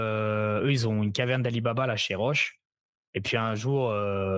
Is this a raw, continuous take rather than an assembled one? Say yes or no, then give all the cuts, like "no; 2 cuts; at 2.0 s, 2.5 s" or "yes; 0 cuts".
yes; 0 cuts